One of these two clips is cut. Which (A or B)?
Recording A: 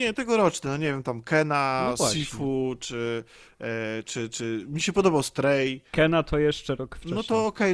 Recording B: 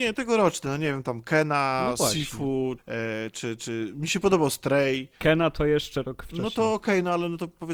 B